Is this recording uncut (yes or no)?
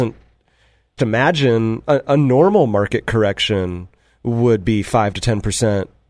no